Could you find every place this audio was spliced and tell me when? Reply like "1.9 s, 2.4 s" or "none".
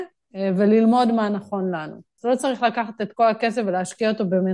2.2 s